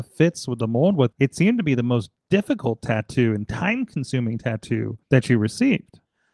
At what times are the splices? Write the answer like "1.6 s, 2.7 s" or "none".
1.1 s, 5.0 s